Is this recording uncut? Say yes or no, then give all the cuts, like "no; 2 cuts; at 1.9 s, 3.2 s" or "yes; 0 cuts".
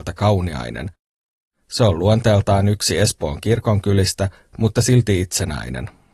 yes; 0 cuts